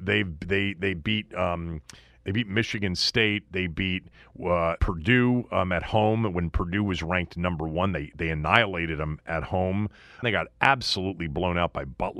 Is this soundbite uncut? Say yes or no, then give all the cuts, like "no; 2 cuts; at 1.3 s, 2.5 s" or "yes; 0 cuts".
no; 2 cuts; at 4.8 s, 10.2 s